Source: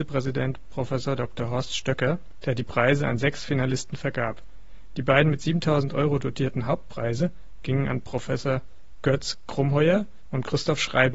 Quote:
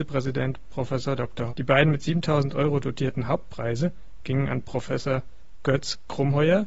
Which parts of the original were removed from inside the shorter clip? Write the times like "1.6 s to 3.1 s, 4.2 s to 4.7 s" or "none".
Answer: 1.5 s to 4.9 s